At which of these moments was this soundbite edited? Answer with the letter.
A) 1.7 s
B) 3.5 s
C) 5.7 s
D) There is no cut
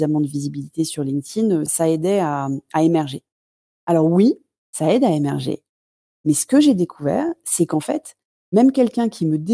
A